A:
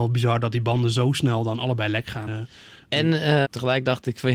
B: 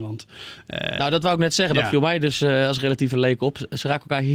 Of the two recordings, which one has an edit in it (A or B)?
A